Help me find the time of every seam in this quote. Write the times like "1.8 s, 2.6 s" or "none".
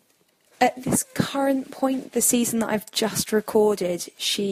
none

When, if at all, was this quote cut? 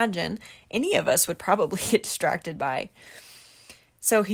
none

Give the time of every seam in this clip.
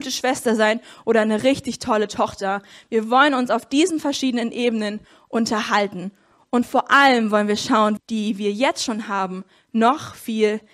8.0 s

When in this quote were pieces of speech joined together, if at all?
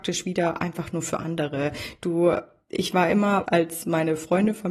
3.4 s

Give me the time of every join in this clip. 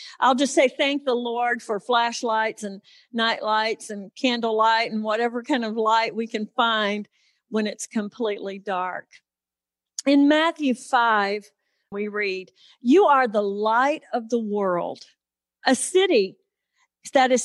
11.9 s

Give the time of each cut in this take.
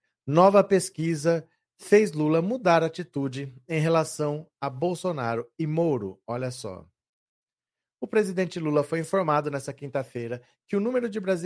none

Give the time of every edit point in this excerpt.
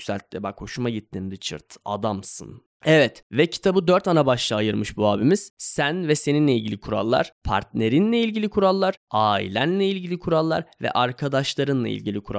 2.7 s

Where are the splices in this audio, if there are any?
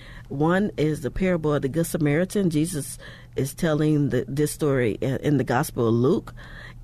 1.1 s

